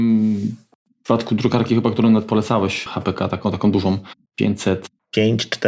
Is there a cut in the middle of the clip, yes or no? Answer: no